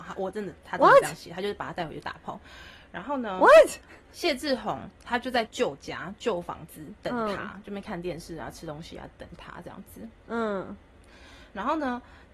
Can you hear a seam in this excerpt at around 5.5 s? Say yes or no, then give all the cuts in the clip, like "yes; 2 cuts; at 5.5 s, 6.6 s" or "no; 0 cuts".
yes; 1 cut; at 5.5 s